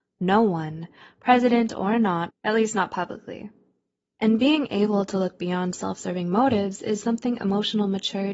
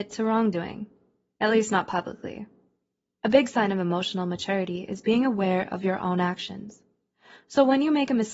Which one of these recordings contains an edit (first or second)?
first